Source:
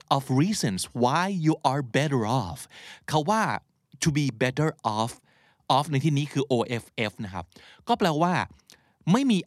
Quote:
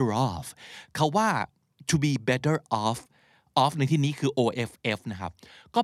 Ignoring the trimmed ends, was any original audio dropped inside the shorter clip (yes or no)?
no